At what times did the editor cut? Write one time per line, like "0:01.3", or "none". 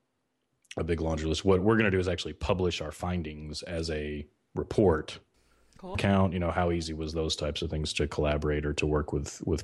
0:05.9